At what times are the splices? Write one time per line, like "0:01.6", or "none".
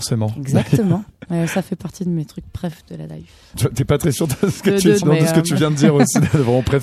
0:03.5
0:05.0